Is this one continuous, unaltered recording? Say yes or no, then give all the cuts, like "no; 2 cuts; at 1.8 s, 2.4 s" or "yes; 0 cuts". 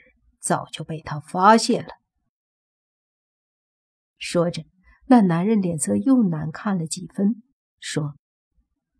yes; 0 cuts